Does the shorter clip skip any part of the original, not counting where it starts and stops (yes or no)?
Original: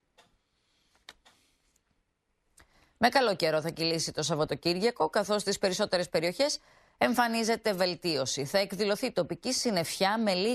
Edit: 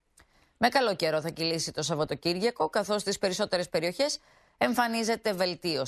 no